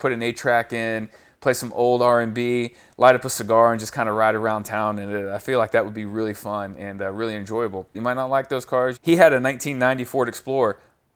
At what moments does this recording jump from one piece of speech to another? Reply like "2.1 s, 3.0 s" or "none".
7.9 s, 9.0 s